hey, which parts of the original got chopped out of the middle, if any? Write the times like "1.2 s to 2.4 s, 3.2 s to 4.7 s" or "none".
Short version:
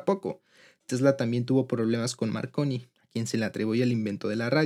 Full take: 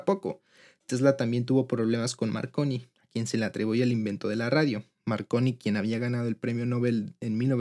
none